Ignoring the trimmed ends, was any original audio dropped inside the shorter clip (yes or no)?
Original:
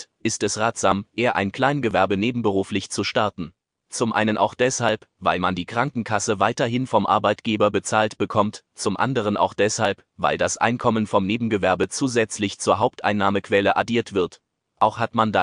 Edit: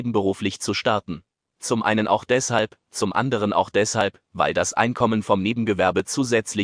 yes